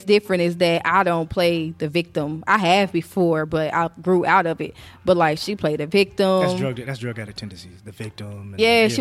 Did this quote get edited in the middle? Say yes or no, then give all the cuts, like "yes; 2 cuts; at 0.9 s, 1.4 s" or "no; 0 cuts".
no; 0 cuts